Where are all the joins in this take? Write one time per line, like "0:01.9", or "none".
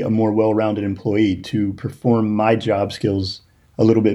none